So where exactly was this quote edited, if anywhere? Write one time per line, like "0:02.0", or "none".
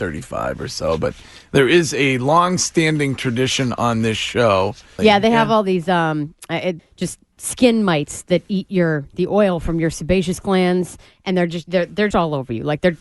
0:05.0
0:06.8
0:12.1